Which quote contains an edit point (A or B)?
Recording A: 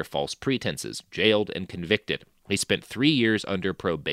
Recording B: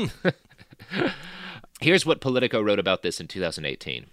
B